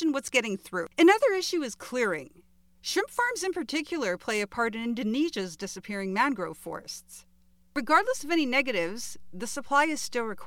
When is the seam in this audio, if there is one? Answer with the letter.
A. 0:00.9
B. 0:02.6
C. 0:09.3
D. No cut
A